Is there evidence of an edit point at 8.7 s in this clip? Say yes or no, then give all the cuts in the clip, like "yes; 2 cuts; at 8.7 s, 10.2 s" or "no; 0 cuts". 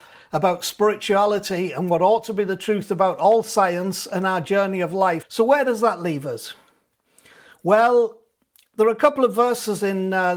no; 1 cut; at 5.2 s